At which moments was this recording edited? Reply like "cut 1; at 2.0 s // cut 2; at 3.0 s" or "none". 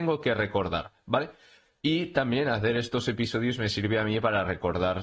cut 1; at 1.8 s